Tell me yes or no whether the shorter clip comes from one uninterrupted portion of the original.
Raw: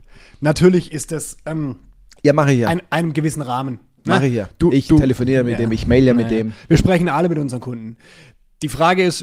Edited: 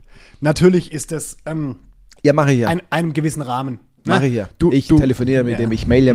yes